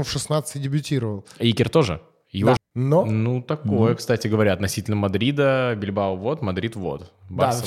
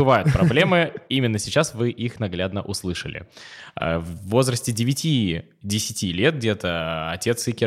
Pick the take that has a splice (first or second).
first